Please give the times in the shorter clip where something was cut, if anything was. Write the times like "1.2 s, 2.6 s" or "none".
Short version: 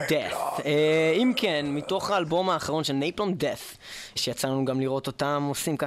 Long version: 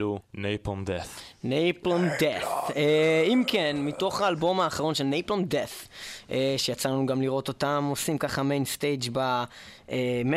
4.2 s